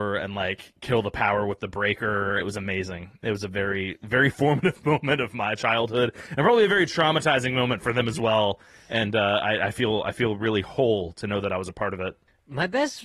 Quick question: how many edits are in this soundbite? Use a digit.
1